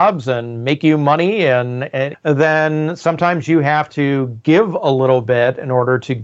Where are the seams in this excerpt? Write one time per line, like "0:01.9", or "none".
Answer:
0:02.1